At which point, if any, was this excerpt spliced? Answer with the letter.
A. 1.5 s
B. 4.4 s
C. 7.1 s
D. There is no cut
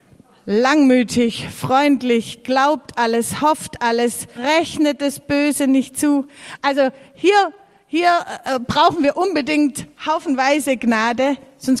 B